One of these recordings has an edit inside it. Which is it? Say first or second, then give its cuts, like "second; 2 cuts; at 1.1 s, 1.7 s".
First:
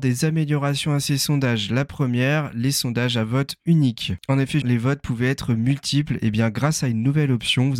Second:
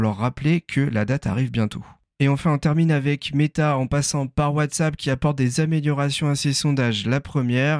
first; 1 cut; at 4.6 s